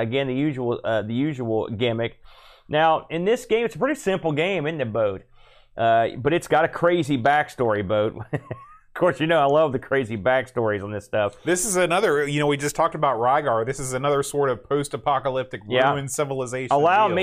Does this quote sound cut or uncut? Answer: uncut